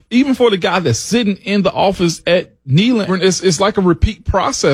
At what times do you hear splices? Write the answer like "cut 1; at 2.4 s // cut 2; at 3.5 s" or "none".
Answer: cut 1; at 3.1 s